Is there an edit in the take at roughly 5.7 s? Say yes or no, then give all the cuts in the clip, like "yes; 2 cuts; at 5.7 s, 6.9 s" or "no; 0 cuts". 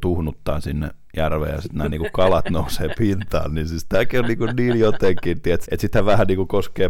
yes; 1 cut; at 5.7 s